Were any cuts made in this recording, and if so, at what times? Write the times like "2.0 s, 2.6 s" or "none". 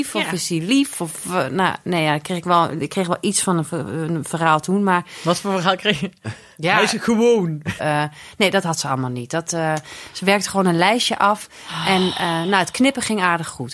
7.8 s

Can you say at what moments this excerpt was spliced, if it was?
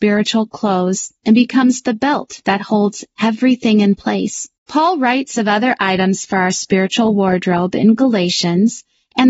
1.2 s, 4.6 s

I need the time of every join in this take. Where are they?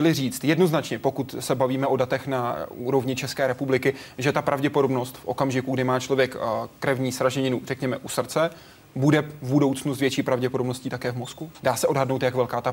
11.6 s

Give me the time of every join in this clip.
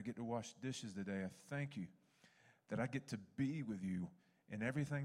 none

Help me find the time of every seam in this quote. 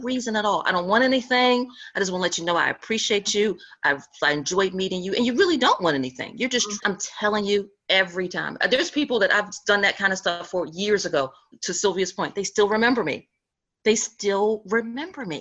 6.8 s

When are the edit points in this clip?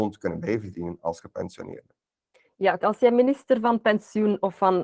2.8 s

